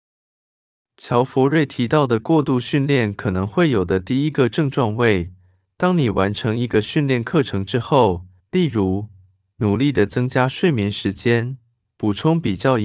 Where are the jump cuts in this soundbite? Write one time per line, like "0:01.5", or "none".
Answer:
0:08.4